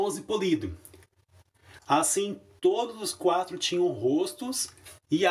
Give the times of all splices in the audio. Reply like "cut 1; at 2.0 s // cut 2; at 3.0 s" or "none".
cut 1; at 1.8 s